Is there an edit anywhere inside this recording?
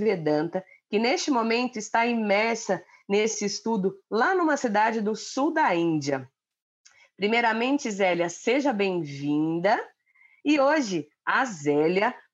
yes; 1 cut; at 10.4 s

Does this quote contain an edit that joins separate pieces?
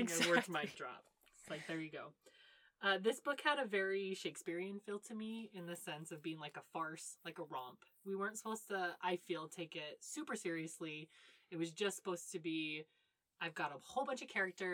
no; 0 cuts

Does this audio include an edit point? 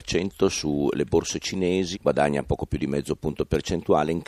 yes; 1 cut; at 1.9 s

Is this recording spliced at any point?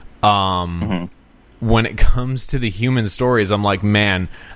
no; 0 cuts

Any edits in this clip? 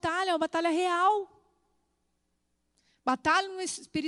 no; 0 cuts

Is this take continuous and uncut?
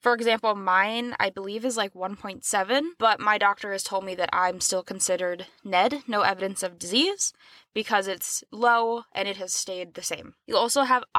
yes; 0 cuts

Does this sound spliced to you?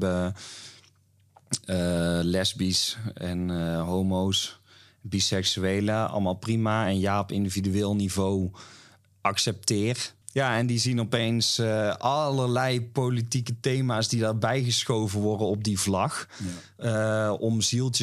yes; 1 cut; at 10.2 s

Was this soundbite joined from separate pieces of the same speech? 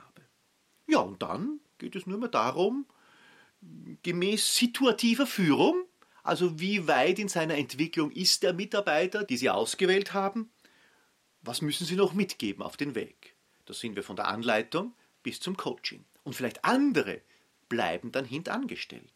yes; 3 cuts; at 9.3 s, 16.1 s, 17.6 s

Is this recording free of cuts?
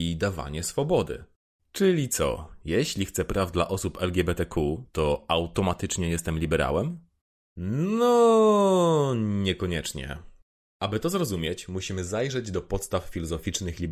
yes; 0 cuts

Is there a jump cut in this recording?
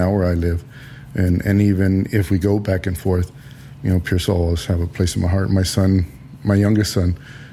no; 0 cuts

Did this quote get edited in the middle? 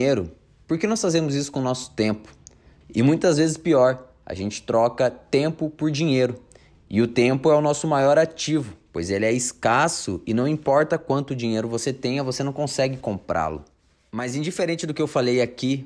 yes; 2 cuts; at 2.8 s, 6.7 s

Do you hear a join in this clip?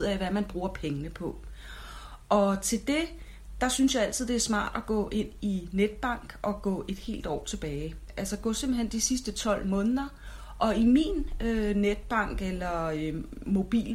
no; 0 cuts

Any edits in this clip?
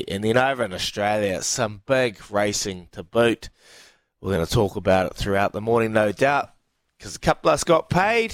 no; 0 cuts

